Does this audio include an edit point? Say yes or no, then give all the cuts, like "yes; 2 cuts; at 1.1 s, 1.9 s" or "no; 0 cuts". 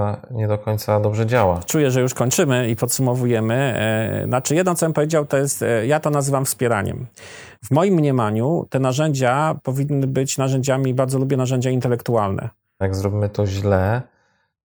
yes; 2 cuts; at 7.6 s, 12.8 s